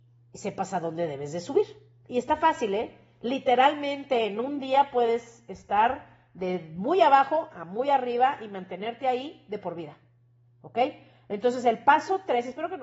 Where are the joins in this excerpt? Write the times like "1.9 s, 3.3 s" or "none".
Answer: none